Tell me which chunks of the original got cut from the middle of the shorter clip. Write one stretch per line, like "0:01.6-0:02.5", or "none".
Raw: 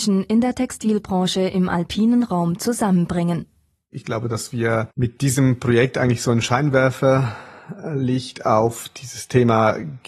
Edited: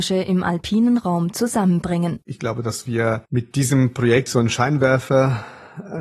0:03.5-0:03.9
0:05.9-0:06.2